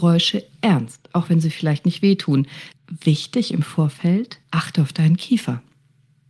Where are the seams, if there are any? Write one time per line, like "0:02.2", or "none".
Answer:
0:02.7
0:04.4